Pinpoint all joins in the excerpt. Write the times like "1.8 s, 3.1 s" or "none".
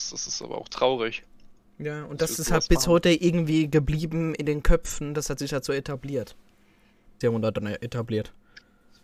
7.2 s